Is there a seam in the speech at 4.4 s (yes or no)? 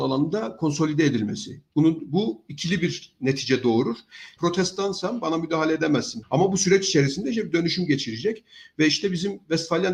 yes